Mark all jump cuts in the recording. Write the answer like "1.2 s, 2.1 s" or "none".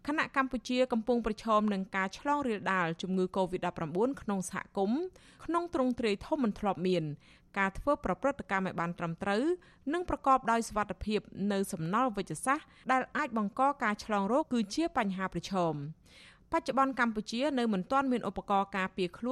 14.4 s